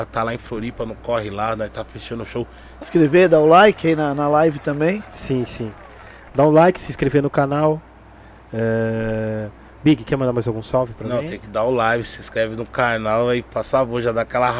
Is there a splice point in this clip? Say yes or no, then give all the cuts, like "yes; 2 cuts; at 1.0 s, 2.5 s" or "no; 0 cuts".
yes; 1 cut; at 2.8 s